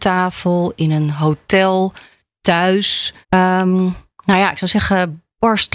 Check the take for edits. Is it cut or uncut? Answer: cut